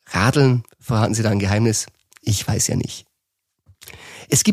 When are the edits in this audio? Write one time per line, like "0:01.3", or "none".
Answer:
none